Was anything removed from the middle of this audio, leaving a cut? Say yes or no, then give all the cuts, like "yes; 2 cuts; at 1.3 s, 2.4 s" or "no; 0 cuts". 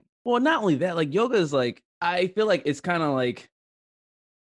yes; 1 cut; at 1.9 s